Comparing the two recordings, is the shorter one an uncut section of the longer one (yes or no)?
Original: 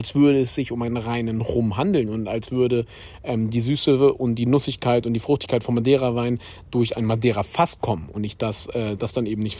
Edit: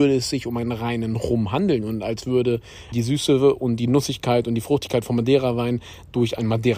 no